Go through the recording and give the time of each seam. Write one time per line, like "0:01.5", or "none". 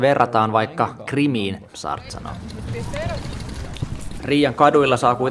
0:01.7
0:04.2